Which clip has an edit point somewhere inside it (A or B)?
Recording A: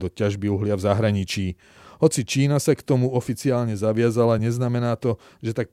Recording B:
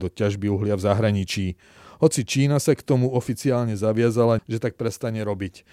B